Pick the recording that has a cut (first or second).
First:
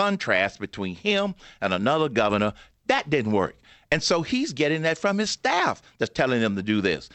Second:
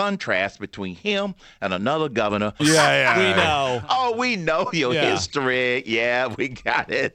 second